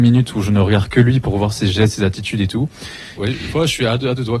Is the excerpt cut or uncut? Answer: cut